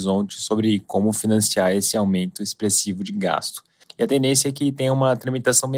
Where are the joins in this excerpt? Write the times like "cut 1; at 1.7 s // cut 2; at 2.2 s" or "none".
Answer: cut 1; at 3.8 s